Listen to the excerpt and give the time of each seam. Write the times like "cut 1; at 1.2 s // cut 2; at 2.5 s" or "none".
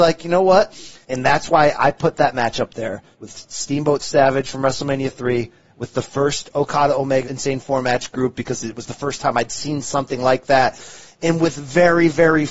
cut 1; at 1.0 s // cut 2; at 3.1 s // cut 3; at 7.2 s